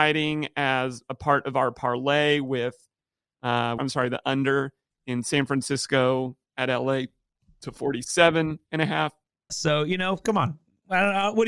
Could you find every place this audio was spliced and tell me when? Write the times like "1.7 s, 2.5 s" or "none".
3.8 s, 9.5 s